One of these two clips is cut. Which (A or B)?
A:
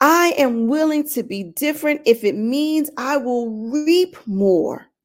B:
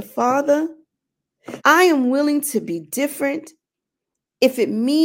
B